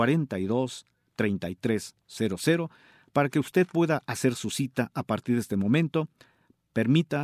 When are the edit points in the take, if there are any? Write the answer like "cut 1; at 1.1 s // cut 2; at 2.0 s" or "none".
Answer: none

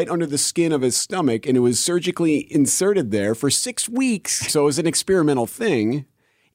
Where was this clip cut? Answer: cut 1; at 4.5 s

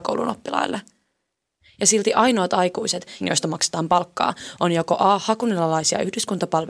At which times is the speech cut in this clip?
cut 1; at 3.2 s

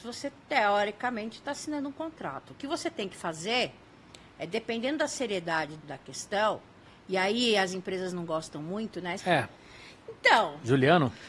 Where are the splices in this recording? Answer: cut 1; at 5.8 s // cut 2; at 9.2 s

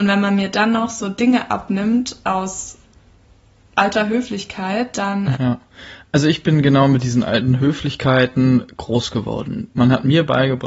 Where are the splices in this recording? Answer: cut 1; at 5.3 s

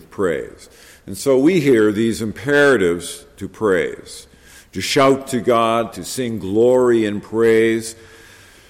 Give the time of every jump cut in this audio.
cut 1; at 5.9 s

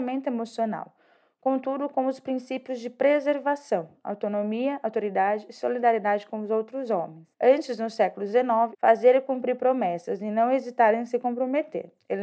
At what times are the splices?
cut 1; at 7.3 s // cut 2; at 8.7 s

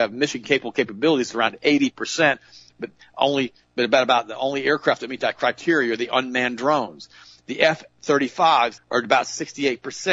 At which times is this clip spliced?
cut 1; at 8.8 s

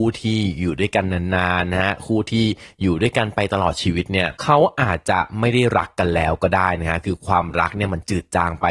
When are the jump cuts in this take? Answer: cut 1; at 4.4 s

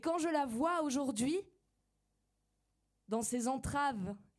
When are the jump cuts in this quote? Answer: none

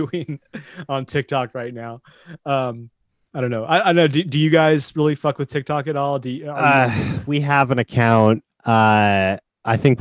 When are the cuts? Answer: cut 1; at 3.3 s

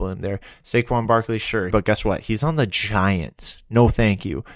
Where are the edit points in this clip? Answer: cut 1; at 1.7 s

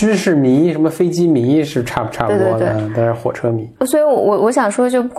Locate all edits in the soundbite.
cut 1; at 3.8 s

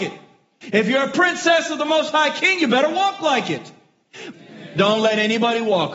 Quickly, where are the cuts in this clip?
cut 1; at 4.3 s

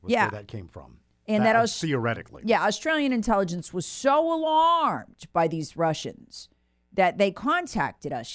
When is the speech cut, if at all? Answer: none

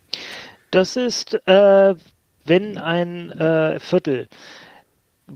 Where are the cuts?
none

